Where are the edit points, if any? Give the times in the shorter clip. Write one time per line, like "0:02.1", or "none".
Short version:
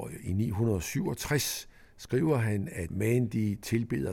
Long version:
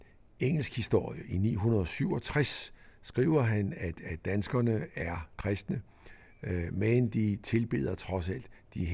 0:02.9